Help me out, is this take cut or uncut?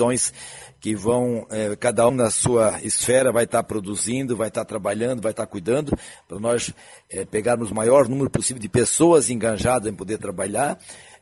cut